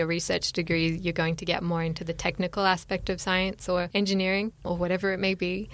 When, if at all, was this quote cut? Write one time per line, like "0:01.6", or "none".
none